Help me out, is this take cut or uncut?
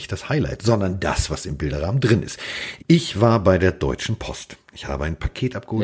cut